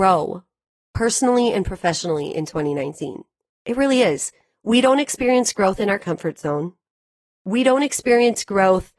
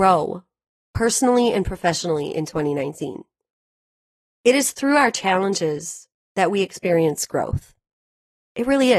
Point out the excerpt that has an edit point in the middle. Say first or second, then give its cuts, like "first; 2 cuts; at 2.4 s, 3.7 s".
first; 1 cut; at 3.5 s